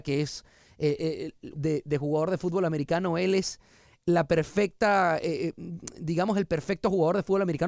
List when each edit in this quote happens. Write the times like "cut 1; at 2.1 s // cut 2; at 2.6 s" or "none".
cut 1; at 1.6 s